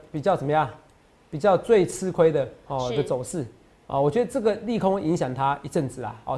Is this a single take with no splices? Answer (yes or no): yes